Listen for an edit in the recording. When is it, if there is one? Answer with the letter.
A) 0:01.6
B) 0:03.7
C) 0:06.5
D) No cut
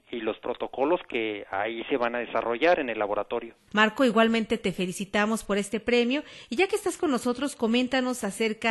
B